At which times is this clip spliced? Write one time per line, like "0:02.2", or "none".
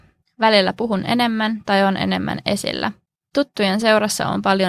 none